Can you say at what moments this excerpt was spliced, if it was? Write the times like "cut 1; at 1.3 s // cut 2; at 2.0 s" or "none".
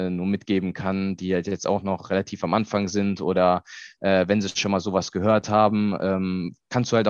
none

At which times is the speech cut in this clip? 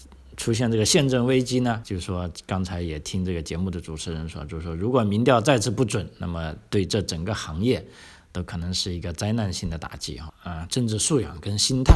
cut 1; at 1.8 s // cut 2; at 10.3 s

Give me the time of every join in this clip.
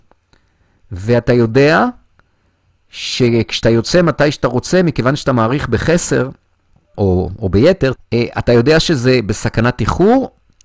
cut 1; at 6.9 s // cut 2; at 8.0 s

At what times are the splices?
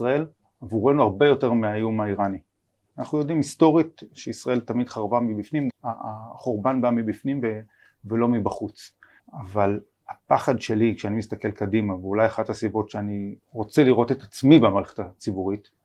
cut 1; at 5.7 s // cut 2; at 9.2 s // cut 3; at 13.4 s

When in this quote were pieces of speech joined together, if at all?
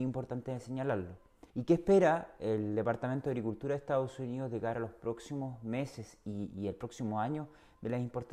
cut 1; at 1.5 s

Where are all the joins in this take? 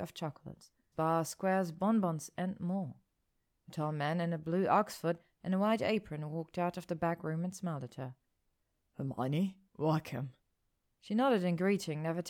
cut 1; at 0.9 s // cut 2; at 9.7 s

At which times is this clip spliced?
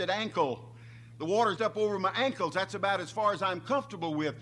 cut 1; at 1.6 s

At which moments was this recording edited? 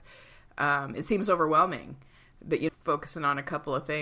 cut 1; at 2.7 s

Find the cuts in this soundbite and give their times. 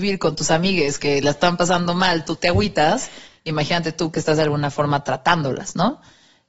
none

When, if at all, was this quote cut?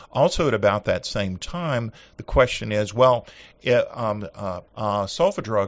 cut 1; at 4.7 s

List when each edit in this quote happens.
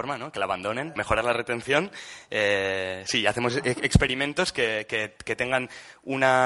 cut 1; at 1.0 s

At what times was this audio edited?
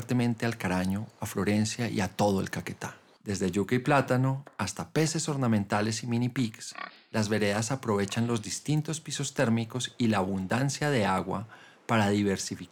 cut 1; at 3.2 s

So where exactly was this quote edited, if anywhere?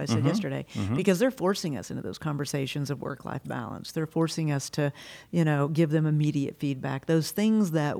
none

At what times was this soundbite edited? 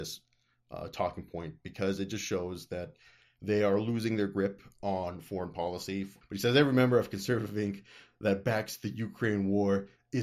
cut 1; at 6.2 s

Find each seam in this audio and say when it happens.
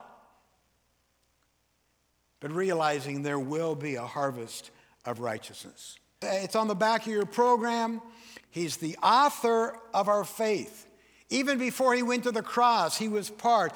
cut 1; at 6.2 s // cut 2; at 8.4 s

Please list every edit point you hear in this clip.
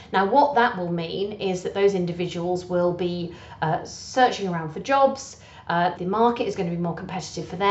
cut 1; at 6.0 s

